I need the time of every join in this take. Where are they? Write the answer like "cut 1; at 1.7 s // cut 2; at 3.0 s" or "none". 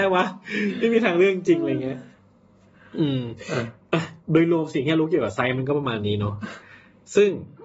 cut 1; at 4.2 s